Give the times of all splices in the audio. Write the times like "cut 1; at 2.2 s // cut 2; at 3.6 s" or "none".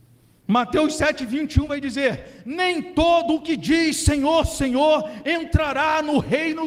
none

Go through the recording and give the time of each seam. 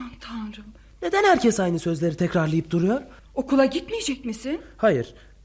cut 1; at 0.9 s // cut 2; at 3.2 s

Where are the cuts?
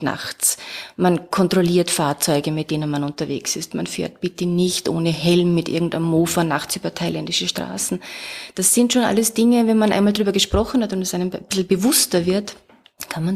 none

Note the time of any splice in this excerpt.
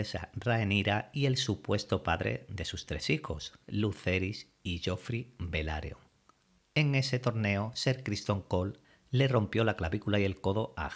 cut 1; at 3.6 s // cut 2; at 6.6 s

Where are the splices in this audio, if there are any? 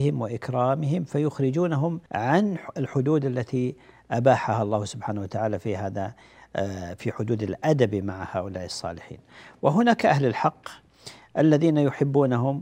cut 1; at 2.1 s

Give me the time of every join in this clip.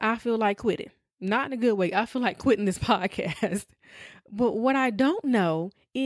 none

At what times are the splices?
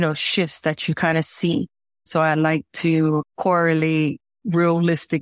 cut 1; at 2.1 s

